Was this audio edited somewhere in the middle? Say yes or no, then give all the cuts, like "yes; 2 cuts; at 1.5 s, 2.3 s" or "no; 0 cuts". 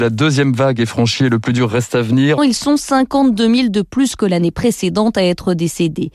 yes; 1 cut; at 2.4 s